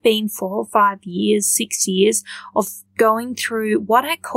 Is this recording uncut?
no; 1 cut; at 2.9 s

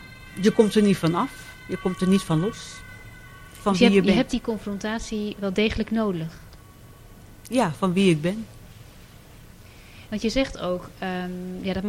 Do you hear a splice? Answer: no; 0 cuts

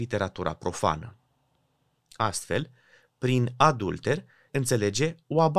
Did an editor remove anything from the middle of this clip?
yes; 2 cuts; at 2.0 s, 4.5 s

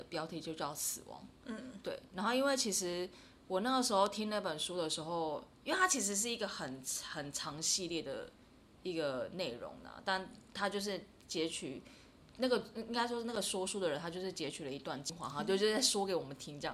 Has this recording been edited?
no; 0 cuts

